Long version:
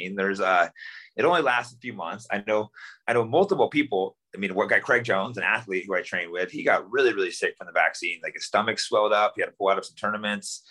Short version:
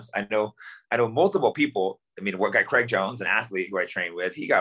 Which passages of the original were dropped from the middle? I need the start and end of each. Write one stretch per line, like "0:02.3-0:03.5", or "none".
none